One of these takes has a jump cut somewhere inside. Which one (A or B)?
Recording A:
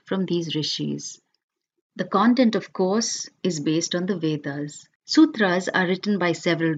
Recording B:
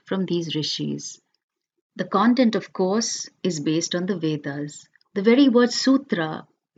A